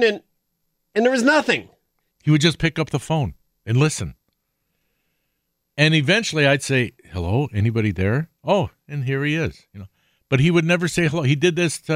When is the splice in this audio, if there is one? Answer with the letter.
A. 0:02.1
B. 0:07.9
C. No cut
A